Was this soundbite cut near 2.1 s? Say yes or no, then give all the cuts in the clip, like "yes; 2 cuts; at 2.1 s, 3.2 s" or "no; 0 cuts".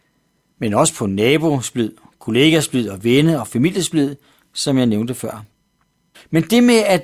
no; 1 cut; at 6.1 s